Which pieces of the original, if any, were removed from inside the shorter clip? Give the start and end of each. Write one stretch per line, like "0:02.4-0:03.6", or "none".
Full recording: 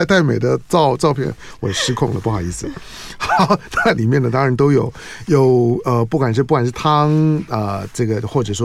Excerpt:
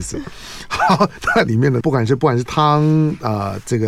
0:04.3-0:06.1